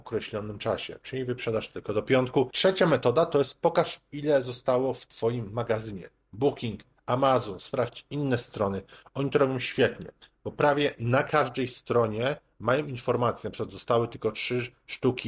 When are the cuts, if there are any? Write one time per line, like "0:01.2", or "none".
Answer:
none